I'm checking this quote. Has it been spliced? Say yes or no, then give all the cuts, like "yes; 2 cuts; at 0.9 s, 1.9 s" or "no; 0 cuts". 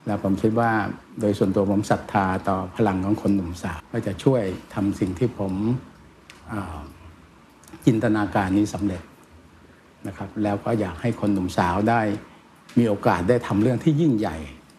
yes; 1 cut; at 3.8 s